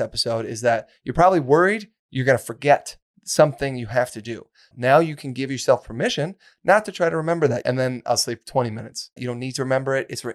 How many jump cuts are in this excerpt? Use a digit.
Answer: 3